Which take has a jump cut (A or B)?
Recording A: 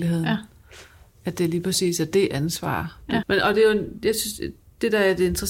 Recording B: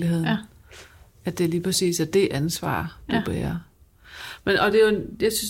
A